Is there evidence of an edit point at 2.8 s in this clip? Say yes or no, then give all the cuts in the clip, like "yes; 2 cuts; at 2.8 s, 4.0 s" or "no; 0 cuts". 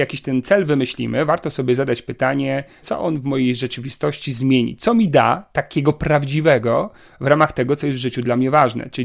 yes; 1 cut; at 2.8 s